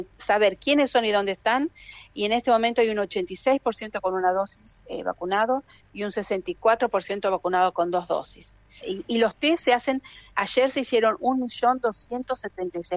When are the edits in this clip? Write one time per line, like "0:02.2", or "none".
0:08.8